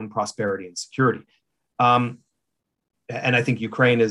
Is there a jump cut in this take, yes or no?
no